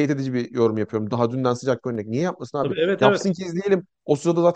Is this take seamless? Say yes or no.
yes